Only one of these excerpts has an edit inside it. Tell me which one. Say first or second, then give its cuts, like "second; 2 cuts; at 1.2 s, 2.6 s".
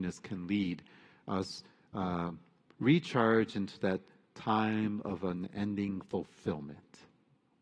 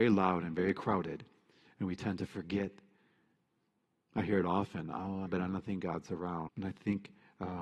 second; 2 cuts; at 5.3 s, 6.5 s